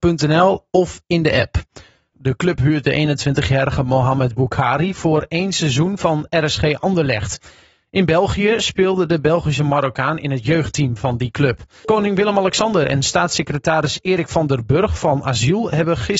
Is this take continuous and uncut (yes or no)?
no